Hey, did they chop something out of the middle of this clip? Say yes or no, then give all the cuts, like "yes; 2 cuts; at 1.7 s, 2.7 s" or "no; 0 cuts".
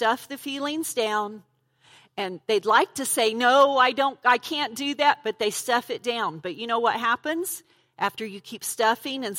no; 0 cuts